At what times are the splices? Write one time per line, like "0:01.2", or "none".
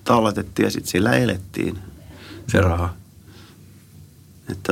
0:02.4